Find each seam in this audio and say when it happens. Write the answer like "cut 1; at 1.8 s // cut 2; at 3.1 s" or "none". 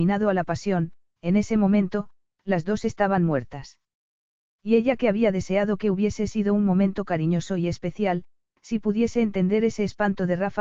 cut 1; at 1.2 s